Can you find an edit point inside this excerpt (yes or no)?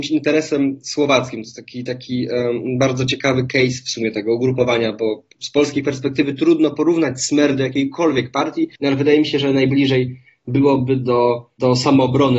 yes